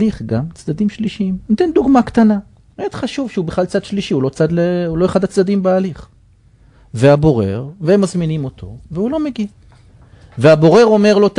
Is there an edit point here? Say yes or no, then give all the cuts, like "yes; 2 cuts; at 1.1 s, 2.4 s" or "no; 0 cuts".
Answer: yes; 1 cut; at 2.7 s